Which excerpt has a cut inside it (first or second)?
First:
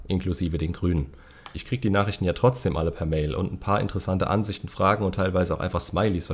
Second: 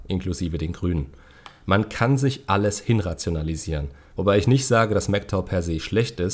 first